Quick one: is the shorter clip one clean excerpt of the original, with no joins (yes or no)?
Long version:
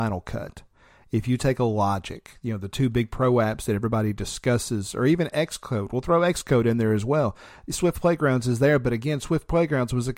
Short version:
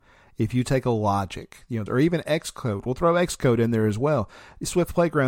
no